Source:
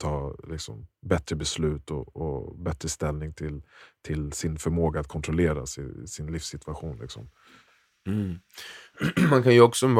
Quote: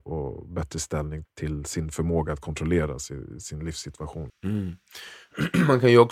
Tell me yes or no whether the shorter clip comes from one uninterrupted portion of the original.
no